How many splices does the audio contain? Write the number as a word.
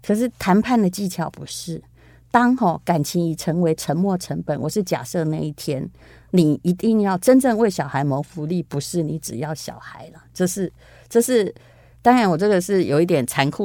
zero